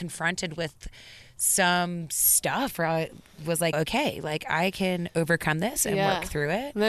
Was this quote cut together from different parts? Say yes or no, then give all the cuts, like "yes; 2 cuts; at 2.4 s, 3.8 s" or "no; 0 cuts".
yes; 1 cut; at 3.7 s